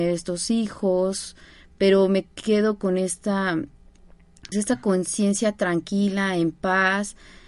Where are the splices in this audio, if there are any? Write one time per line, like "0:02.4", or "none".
0:04.5